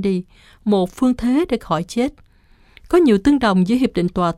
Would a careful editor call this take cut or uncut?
uncut